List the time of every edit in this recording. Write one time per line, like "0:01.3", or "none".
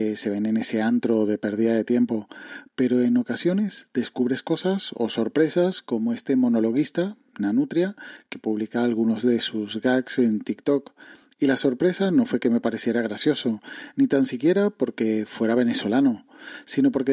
none

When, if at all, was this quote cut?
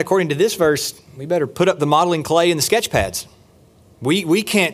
none

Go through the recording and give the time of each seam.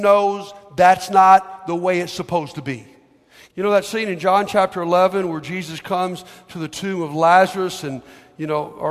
0:03.5

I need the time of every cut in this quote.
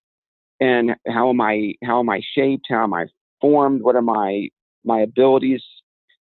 none

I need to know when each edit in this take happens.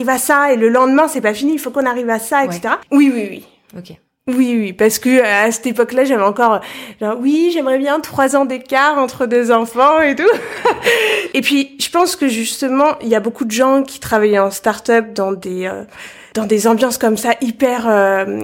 0:02.9

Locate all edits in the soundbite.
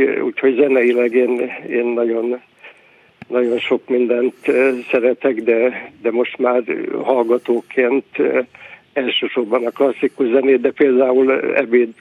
none

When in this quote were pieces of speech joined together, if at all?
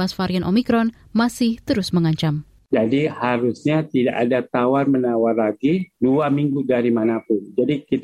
0:05.9

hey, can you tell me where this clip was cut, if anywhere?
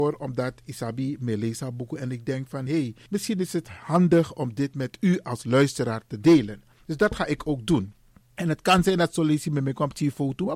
none

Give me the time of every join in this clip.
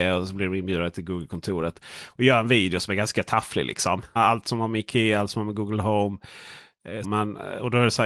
0:04.2
0:07.0

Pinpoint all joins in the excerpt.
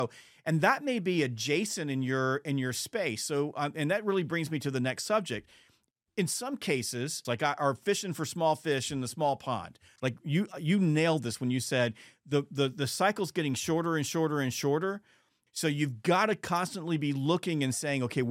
0:07.2
0:10.0
0:15.5

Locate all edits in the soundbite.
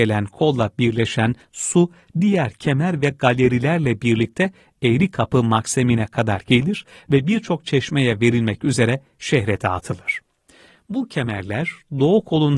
none

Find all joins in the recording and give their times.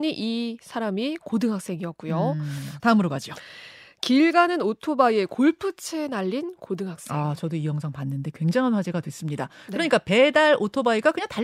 0:02.8

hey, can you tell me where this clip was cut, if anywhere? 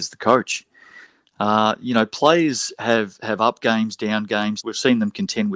0:04.6

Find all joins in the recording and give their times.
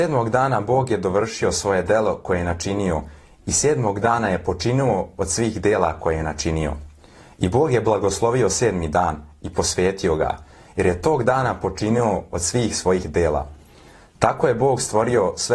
none

